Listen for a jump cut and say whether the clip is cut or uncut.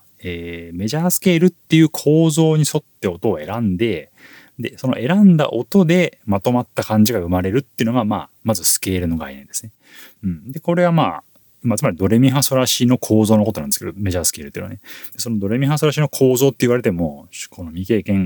uncut